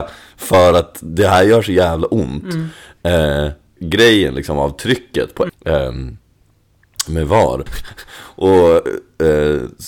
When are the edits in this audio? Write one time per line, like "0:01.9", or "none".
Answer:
0:03.8
0:05.5
0:07.7